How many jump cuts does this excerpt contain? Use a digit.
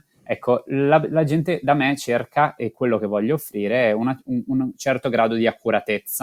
1